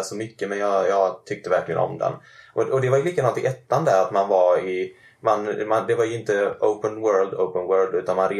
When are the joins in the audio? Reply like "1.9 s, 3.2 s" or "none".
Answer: none